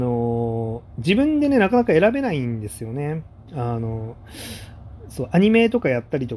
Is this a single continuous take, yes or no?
yes